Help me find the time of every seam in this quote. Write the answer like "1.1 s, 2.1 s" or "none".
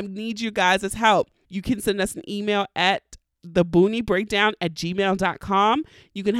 1.4 s